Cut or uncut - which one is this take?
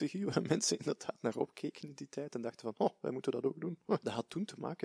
uncut